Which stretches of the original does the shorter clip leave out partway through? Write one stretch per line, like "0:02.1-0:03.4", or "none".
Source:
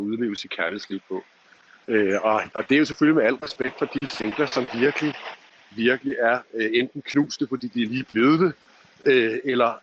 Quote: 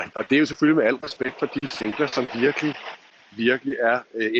none